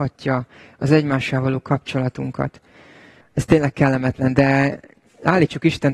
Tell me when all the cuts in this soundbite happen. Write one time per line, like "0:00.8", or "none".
0:03.2